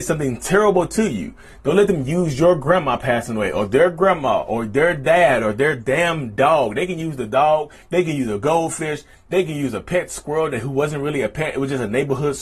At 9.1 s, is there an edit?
no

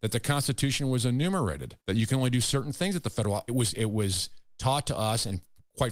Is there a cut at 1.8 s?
yes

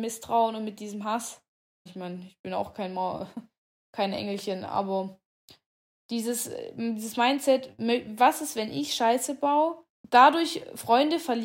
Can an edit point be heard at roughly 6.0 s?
no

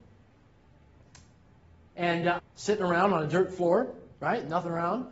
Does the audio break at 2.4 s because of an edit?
yes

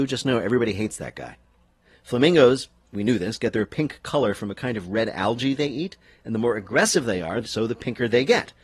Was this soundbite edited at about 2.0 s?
no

